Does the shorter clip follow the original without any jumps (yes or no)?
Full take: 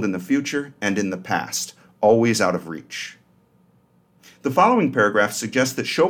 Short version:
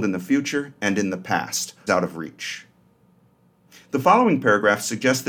no